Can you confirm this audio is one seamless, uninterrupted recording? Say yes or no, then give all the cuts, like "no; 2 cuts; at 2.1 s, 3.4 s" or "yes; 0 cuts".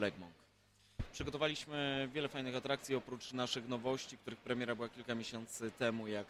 yes; 0 cuts